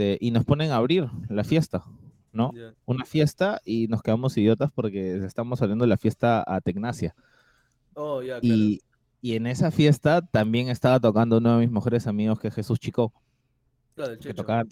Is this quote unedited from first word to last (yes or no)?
yes